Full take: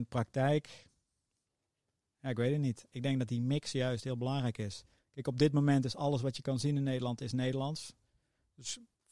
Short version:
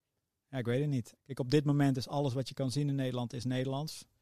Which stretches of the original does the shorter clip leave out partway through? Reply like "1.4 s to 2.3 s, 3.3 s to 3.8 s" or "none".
2.9 s to 5.0 s